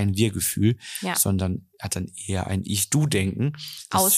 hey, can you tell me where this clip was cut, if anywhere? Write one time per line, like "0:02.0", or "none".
none

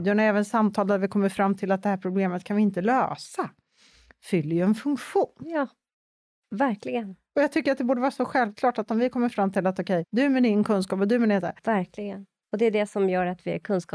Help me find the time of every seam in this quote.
0:10.0
0:11.6

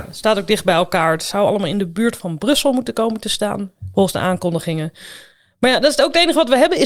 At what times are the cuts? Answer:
none

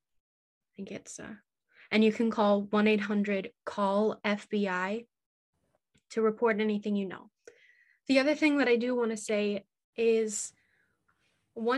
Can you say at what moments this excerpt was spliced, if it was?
none

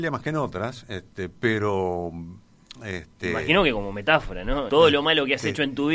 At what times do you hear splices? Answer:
0:04.7

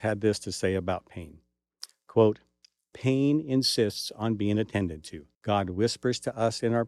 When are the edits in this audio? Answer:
0:05.3

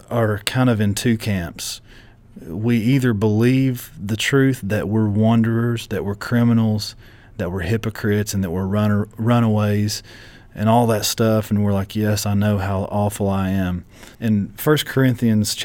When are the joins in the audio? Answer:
0:14.1

